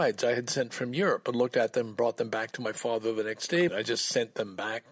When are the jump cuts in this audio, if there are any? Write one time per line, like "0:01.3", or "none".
0:03.7